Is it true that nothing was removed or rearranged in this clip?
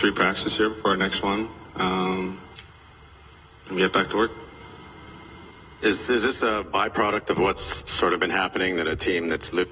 yes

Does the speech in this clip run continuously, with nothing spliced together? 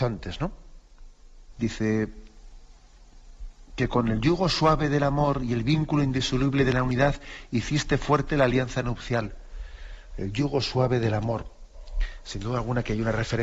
no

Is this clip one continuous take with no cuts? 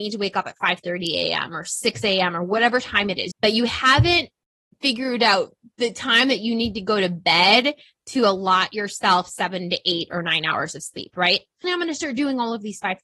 no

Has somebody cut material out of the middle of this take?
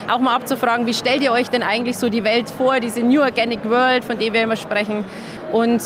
no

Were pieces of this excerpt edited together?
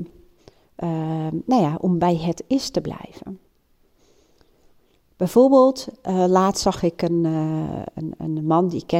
no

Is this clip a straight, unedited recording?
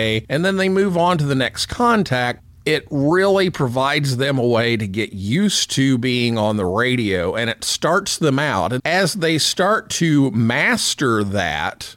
no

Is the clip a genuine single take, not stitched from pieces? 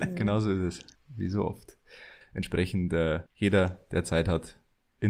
no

